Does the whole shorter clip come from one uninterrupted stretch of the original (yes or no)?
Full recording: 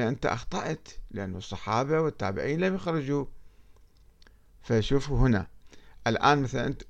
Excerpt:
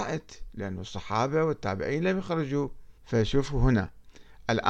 no